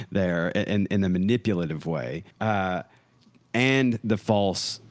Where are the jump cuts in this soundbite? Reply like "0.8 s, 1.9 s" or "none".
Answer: 2.3 s